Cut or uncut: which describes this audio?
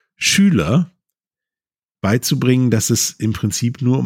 uncut